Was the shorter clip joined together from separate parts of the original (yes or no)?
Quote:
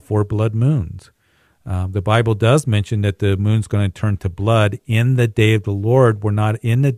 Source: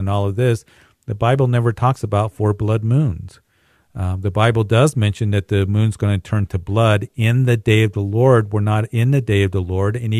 no